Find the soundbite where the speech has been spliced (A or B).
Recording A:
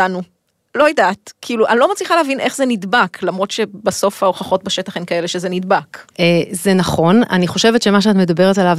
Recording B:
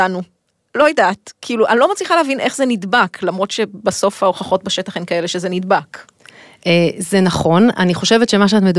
A